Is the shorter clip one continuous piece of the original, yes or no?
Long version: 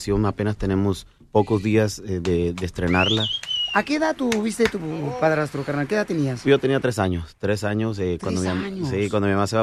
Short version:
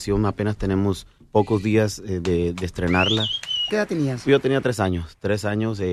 no